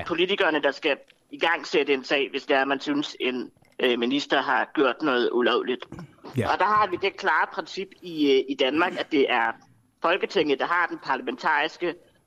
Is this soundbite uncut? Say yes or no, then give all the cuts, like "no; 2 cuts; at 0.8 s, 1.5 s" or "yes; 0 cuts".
yes; 0 cuts